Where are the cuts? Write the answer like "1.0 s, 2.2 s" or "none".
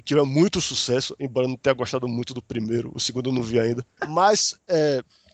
4.0 s